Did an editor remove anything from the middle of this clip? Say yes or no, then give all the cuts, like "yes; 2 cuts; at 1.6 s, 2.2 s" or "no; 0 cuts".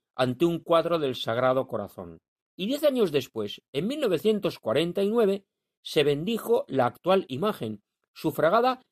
yes; 1 cut; at 2.4 s